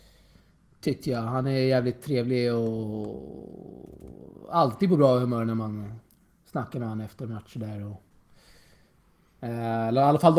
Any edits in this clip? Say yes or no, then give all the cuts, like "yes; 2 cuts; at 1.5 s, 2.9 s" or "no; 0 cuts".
no; 0 cuts